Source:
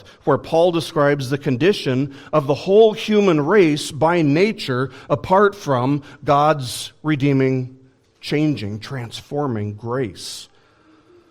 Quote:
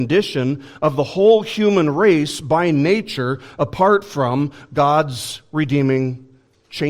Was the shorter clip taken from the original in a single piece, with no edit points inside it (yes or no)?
yes